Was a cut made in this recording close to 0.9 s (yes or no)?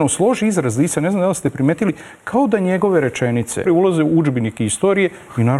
no